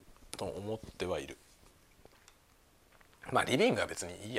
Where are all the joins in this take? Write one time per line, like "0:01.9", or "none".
none